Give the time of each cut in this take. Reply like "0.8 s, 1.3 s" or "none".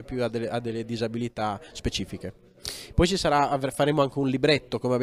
2.9 s